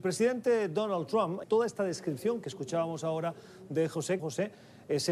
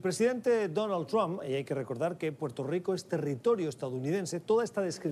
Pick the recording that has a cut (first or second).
first